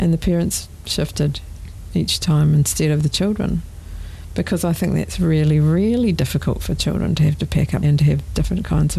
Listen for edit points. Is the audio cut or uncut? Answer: cut